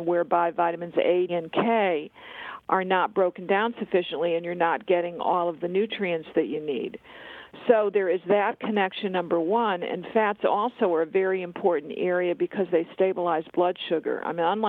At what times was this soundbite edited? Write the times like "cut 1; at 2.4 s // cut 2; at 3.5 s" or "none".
cut 1; at 1.3 s